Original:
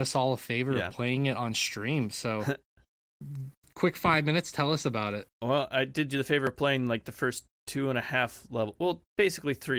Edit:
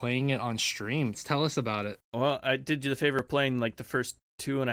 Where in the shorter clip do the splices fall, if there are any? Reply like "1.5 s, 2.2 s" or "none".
1.1 s